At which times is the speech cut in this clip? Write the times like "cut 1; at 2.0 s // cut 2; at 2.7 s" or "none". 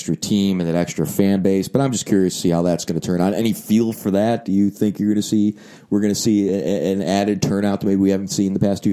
none